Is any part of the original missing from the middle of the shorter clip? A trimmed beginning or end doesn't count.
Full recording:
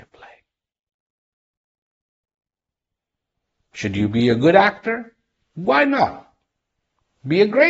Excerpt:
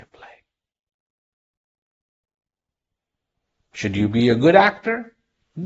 no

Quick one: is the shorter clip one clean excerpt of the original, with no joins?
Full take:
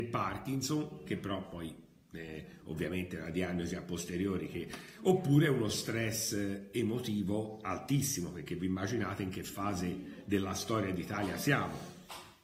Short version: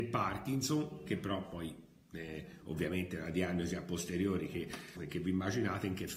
no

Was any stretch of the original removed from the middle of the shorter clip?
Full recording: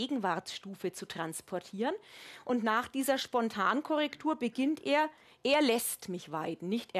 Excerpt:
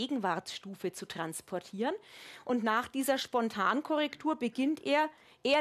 no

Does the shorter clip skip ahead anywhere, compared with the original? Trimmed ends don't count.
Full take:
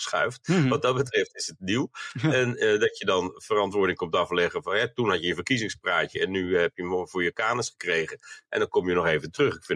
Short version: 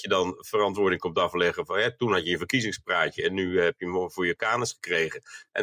no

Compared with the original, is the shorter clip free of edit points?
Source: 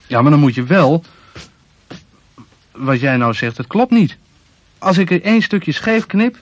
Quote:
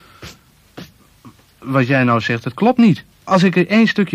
no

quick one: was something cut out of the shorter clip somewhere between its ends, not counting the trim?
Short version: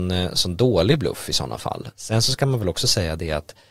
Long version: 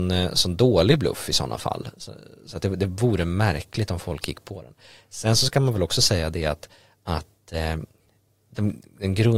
yes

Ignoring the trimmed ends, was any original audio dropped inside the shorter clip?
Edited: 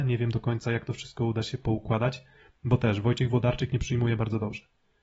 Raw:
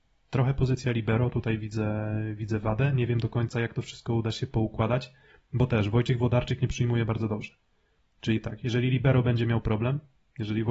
no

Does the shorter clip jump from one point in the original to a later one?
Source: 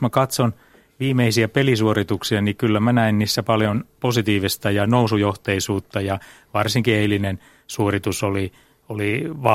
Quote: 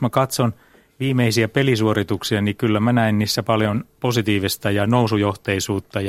no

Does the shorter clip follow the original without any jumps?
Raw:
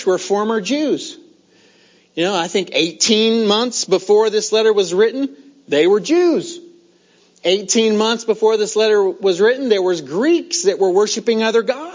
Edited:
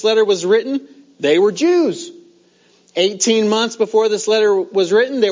yes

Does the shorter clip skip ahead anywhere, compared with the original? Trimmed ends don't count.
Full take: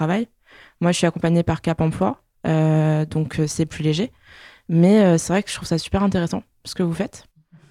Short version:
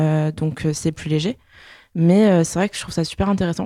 no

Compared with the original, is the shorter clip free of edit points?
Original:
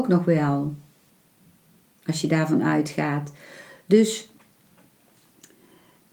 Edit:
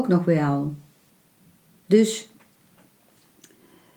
no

